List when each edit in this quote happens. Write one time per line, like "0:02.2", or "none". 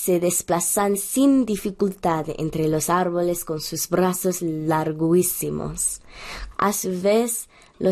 0:06.5

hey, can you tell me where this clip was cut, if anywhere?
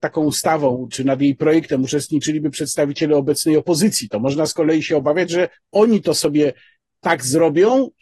0:00.9

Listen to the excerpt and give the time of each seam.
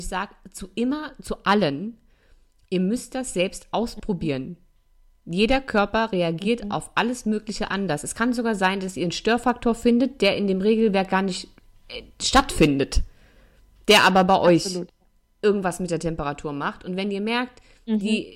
none

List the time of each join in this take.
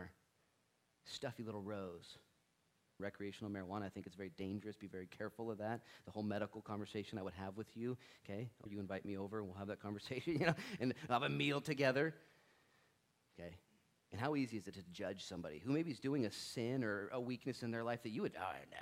0:03.0
0:08.7
0:13.3

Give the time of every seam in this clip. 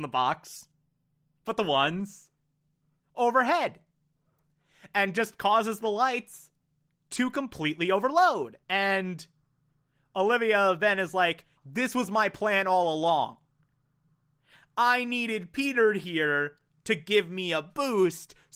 0:08.6
0:11.6

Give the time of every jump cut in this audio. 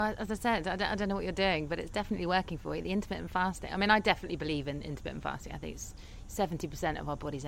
0:06.2

